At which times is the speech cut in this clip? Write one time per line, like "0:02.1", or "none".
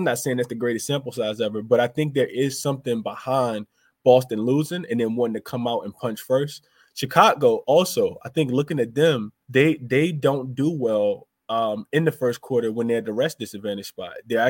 0:09.4